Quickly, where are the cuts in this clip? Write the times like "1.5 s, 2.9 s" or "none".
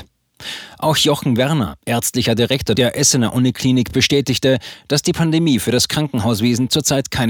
none